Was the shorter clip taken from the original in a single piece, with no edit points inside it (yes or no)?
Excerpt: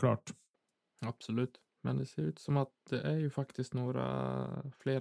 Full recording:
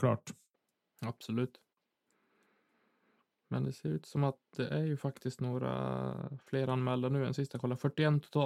no